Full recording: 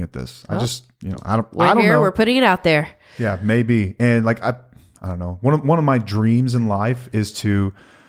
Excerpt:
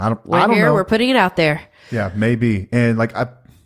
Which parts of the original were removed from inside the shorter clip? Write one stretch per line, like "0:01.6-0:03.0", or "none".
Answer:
none